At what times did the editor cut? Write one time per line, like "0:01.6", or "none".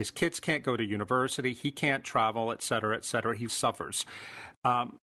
0:03.5